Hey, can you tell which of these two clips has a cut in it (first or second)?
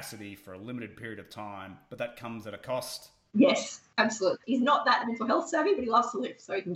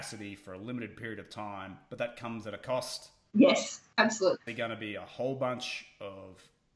first